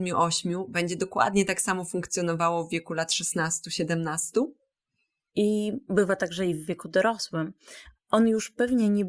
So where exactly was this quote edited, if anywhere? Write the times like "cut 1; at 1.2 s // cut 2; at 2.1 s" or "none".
cut 1; at 5.3 s // cut 2; at 8.0 s